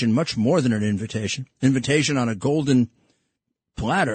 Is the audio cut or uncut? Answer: uncut